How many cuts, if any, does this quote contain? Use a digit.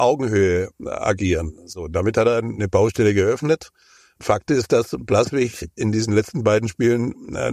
0